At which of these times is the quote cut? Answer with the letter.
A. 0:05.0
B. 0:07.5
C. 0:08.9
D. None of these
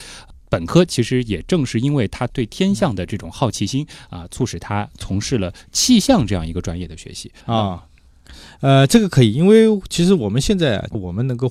B